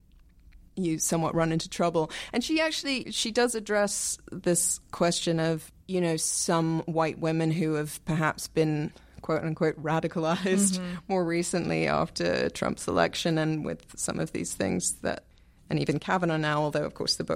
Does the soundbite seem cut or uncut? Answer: cut